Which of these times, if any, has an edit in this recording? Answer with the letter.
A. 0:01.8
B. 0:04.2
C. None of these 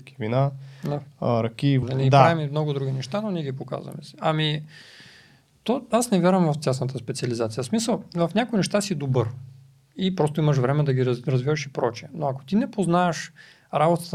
A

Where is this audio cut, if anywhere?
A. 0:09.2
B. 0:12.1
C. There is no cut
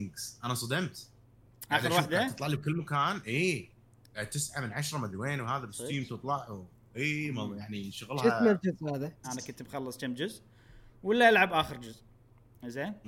A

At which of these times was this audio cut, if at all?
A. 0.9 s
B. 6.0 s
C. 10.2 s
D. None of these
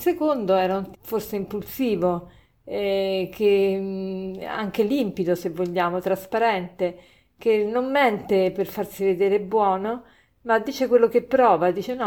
A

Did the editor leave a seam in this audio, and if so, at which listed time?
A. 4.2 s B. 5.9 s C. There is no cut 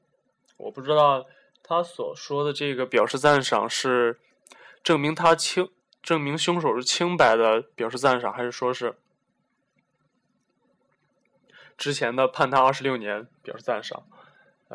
C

